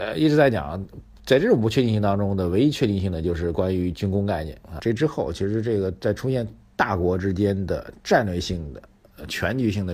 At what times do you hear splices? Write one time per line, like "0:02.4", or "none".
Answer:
0:04.8

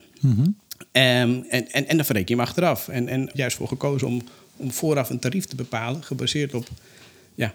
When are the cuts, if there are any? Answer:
0:03.3

